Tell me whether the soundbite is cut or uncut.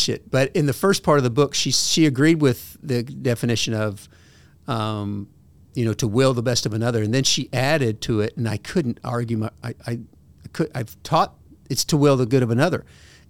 uncut